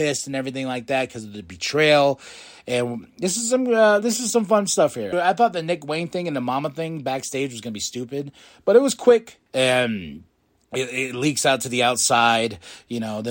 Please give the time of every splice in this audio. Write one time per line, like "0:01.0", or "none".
0:05.1
0:09.5